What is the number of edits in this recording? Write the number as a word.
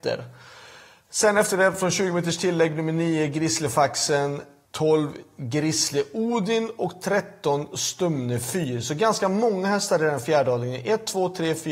one